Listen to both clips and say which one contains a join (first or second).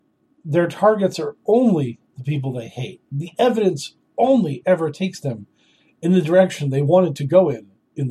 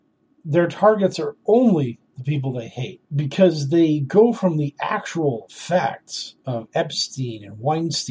second